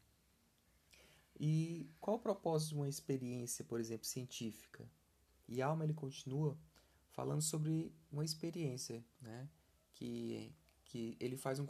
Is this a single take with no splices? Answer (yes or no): no